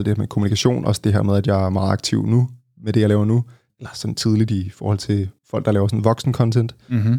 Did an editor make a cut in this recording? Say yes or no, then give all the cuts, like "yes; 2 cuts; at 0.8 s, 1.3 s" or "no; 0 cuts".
yes; 2 cuts; at 3.7 s, 5.4 s